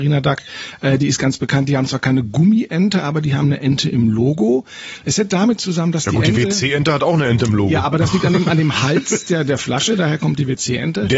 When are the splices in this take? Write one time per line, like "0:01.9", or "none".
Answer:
none